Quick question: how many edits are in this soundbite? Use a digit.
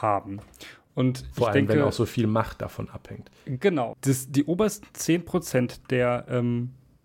1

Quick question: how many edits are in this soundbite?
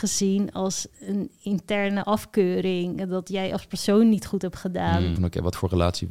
1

